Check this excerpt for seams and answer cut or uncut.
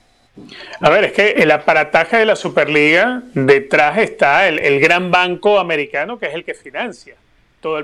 cut